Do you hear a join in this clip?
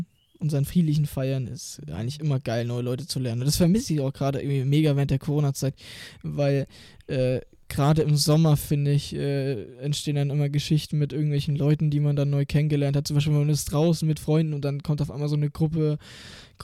no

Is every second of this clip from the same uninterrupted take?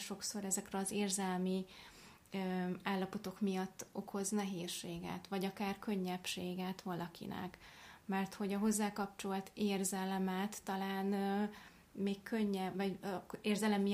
no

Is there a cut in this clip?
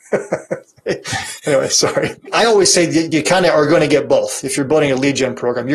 no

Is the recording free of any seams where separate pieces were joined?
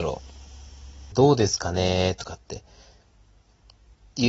no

